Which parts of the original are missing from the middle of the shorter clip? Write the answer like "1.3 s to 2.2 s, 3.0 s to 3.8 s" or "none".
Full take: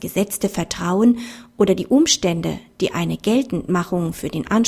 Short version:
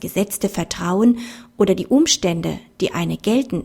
none